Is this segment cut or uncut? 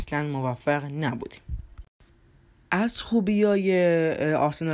uncut